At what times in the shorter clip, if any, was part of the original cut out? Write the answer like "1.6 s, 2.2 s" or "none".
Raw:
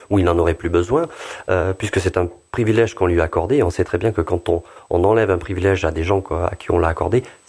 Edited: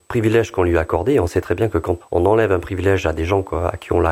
2.0 s

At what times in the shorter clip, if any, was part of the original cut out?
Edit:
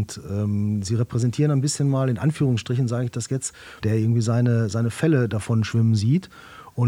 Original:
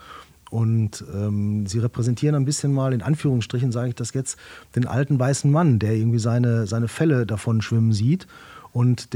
3.8 s

